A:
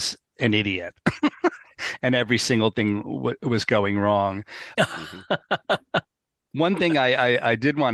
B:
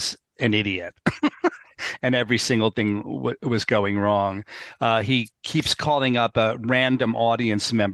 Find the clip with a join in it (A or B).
A